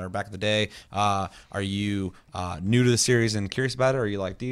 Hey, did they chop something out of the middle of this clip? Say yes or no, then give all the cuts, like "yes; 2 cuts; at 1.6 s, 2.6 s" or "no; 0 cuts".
no; 0 cuts